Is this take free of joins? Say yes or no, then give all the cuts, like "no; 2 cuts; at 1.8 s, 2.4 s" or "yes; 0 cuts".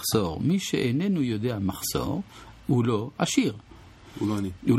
yes; 0 cuts